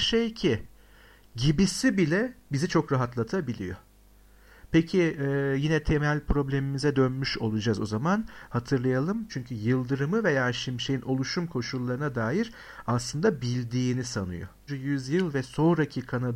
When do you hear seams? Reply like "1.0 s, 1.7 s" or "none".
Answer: 9.3 s, 14.7 s